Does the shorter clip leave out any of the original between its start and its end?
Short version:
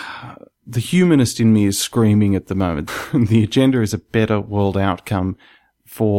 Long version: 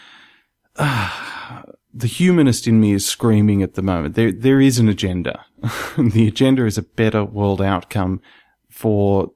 yes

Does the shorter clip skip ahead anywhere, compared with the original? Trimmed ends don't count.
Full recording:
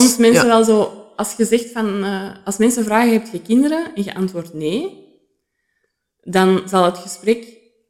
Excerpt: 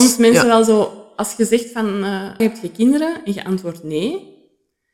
yes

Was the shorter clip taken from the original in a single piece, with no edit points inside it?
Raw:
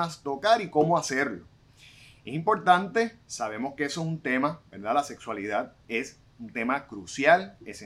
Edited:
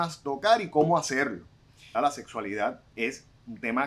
no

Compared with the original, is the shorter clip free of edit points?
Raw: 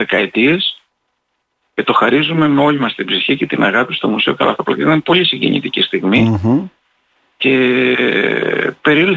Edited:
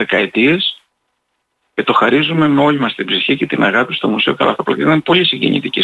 yes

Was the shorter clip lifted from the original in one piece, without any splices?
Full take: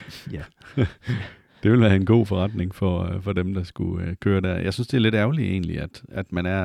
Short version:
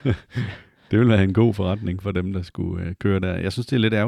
no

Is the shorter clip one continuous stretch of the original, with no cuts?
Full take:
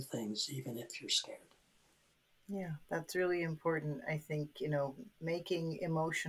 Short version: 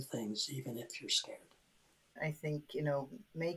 no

